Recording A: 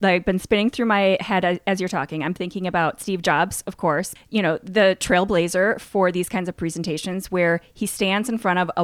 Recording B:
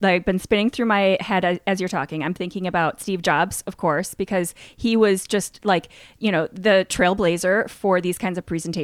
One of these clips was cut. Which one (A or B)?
A